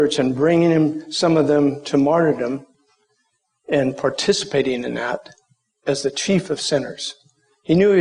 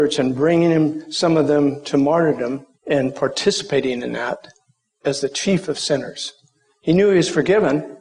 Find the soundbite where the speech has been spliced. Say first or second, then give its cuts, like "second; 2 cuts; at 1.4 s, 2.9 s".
second; 1 cut; at 2.7 s